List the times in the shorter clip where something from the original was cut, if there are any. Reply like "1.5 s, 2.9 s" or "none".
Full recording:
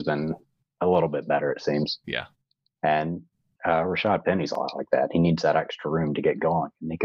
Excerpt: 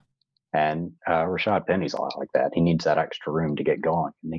1.0 s